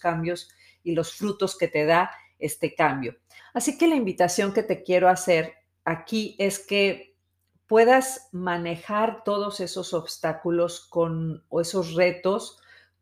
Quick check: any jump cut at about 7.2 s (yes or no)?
no